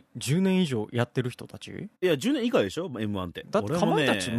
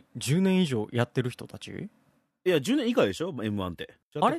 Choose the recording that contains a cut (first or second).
first